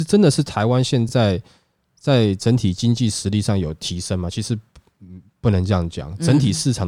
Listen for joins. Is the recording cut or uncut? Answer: uncut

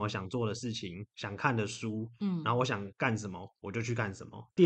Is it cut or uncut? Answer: uncut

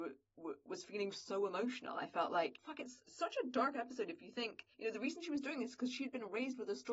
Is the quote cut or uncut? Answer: cut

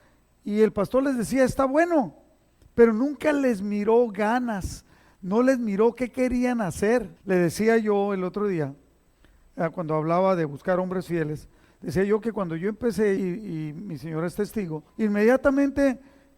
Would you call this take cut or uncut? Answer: cut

